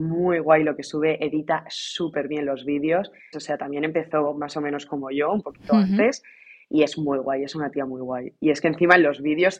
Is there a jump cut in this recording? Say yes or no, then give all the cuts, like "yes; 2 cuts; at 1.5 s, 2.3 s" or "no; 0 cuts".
yes; 1 cut; at 3.3 s